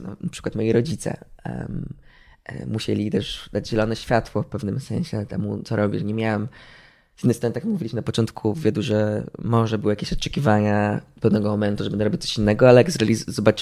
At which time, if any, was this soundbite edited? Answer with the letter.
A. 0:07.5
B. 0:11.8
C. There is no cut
C